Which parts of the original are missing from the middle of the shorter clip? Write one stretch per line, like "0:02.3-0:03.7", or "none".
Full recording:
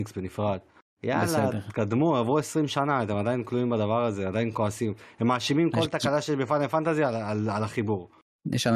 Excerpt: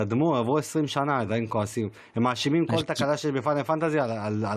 0:03.1-0:04.3

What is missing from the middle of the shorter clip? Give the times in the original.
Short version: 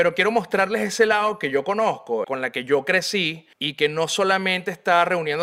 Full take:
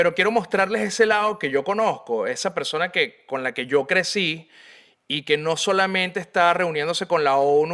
0:02.2-0:03.3
0:04.5-0:05.0

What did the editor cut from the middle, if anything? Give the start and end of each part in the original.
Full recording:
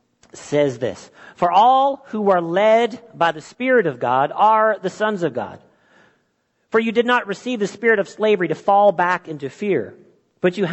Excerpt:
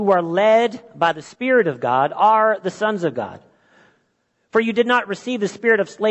none

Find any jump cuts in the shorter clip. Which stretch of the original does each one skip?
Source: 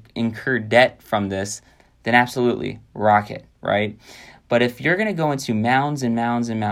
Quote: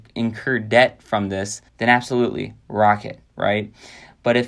0:01.7-0:01.9

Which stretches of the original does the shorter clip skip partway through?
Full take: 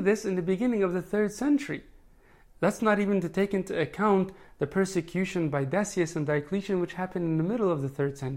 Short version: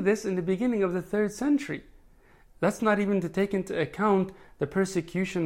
none

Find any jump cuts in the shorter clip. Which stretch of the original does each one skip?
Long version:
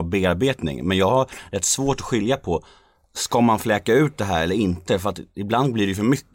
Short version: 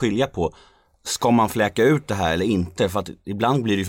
none

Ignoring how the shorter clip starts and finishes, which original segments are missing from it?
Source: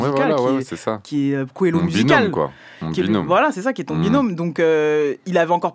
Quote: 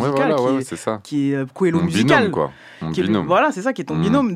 none

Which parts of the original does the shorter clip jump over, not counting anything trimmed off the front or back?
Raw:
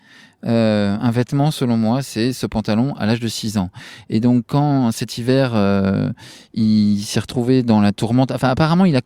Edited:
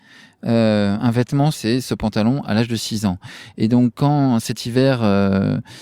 0:01.5-0:02.0

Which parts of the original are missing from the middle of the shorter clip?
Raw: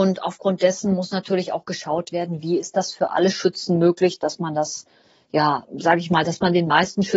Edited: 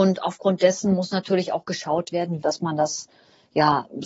0:02.4-0:04.2

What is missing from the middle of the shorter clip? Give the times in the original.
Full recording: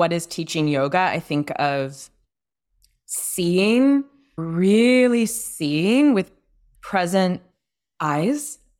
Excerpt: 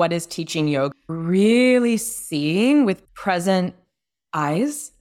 0:00.9-0:04.2
0:06.3-0:06.7

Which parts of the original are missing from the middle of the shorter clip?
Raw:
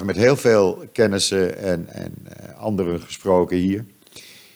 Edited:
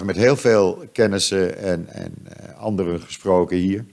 none

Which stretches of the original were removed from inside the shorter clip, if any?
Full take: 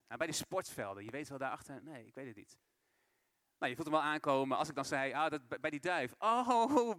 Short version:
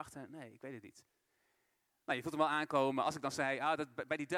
none

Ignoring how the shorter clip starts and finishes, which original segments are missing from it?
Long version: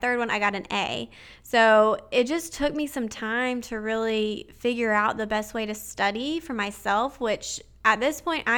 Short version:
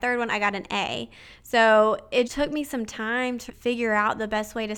0:02.3-0:02.5
0:03.7-0:04.5

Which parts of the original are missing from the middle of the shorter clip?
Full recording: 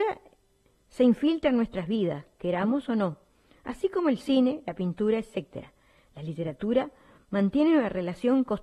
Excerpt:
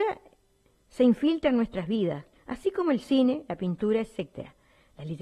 0:02.3-0:03.5

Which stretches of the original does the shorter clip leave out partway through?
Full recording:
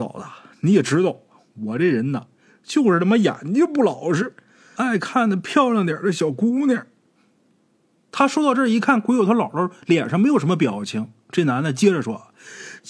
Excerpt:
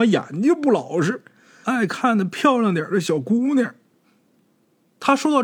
none

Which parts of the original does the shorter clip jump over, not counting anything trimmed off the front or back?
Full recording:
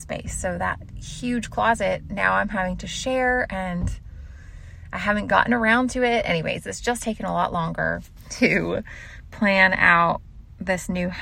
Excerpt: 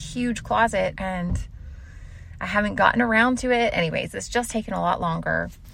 0:02.0-0:03.5

